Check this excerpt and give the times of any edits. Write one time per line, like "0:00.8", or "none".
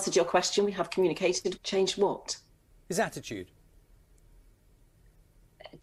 0:01.6